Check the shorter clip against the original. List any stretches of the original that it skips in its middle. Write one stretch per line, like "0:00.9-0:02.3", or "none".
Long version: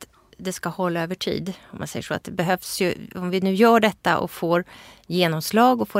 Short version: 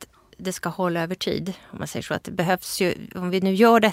none